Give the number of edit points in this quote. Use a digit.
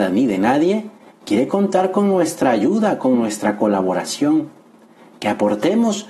0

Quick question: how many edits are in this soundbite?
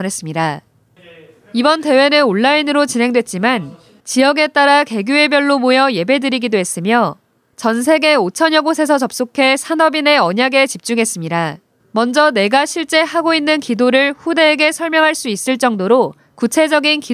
1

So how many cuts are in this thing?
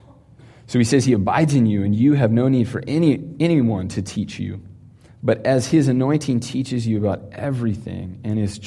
0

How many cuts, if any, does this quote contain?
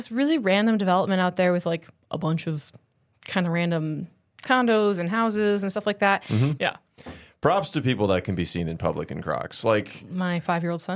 1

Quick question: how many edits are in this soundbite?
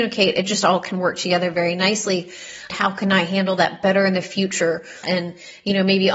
2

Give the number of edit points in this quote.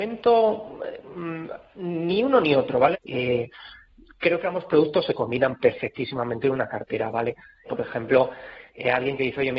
2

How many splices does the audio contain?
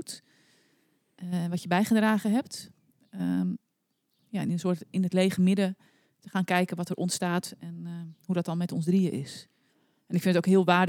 1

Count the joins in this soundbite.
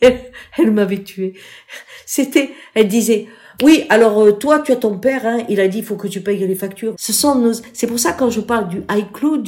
1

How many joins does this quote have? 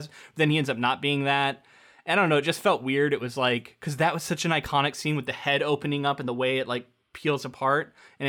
0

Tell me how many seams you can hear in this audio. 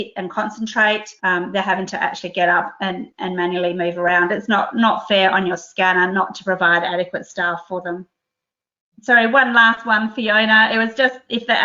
1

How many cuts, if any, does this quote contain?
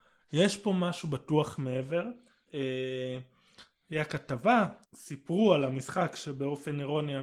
2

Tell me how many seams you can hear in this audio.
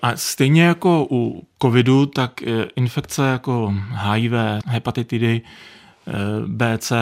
1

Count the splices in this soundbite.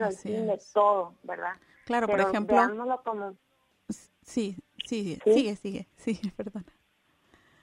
0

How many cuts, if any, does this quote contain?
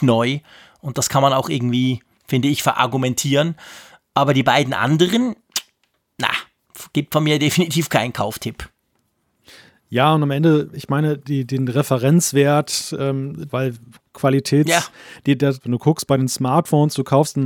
2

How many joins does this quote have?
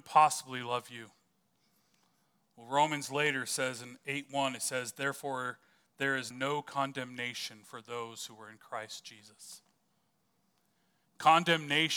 1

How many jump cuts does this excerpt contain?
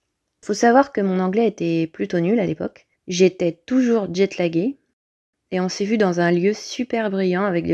1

